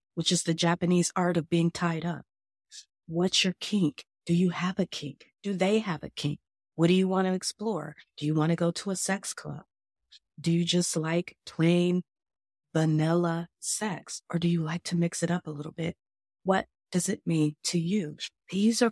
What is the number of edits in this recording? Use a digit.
1